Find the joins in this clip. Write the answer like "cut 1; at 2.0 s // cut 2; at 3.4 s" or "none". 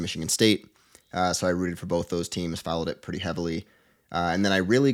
none